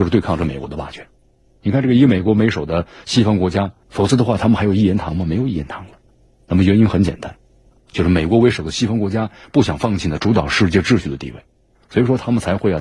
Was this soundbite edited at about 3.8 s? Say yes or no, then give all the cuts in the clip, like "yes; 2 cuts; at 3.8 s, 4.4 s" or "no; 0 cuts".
yes; 2 cuts; at 3.8 s, 7.8 s